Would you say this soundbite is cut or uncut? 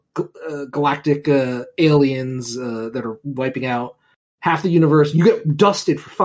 uncut